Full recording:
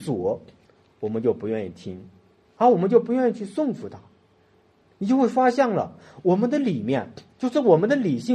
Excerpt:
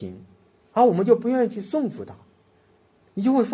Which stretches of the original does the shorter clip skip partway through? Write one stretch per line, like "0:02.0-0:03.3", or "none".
none

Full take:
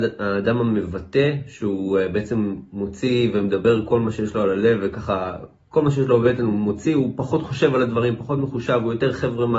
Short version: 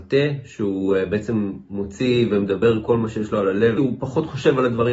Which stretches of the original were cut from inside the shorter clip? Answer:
0:04.8-0:06.9

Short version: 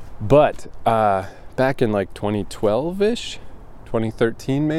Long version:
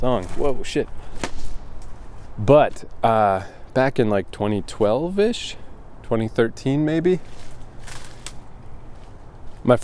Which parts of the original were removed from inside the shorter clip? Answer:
none

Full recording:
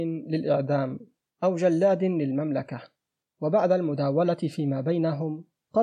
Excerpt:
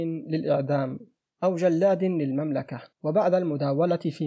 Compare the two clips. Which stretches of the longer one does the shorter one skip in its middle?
0:02.9-0:03.3

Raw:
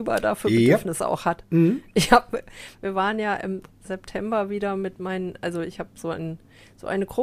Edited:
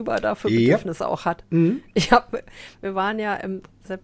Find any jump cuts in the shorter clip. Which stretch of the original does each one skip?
none

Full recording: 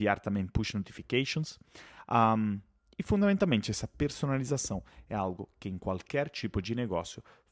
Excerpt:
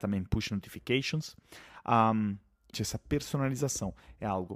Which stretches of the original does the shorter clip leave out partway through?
0:03.0-0:03.6

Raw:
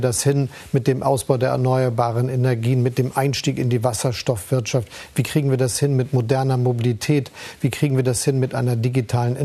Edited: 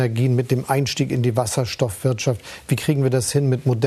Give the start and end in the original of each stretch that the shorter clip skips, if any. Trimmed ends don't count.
none

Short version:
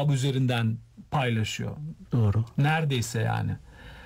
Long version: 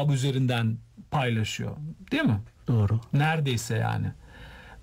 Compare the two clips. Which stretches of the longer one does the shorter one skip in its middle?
0:02.0-0:02.6

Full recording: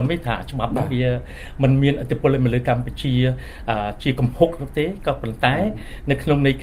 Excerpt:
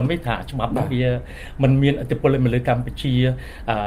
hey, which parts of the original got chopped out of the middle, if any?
none

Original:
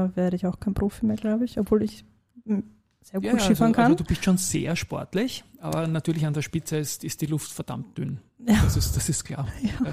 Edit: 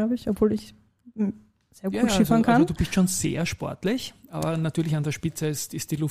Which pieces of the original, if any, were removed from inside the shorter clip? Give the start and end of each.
none

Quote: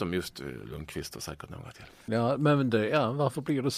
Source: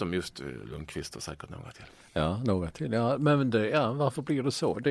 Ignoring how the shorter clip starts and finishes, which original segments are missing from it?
0:02.1-0:02.9

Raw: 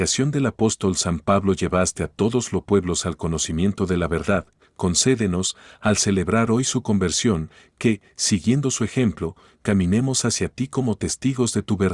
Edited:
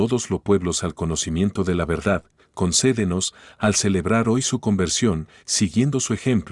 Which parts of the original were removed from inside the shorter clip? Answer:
0:07.6-0:08.1

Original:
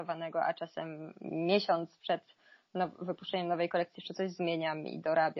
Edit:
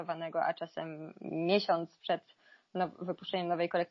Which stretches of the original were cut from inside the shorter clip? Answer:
none

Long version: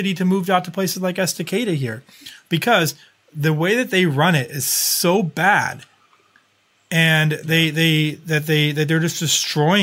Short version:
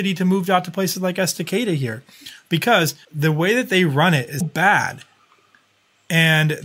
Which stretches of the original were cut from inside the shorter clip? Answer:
0:03.0-0:03.3
0:04.6-0:05.2

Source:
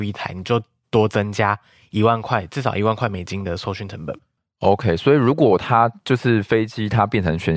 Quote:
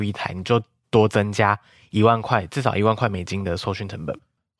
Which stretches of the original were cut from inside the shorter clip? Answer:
none

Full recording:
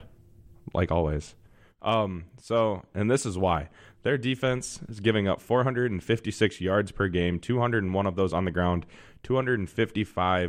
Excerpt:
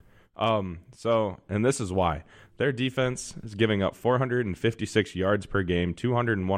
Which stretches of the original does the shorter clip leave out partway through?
none

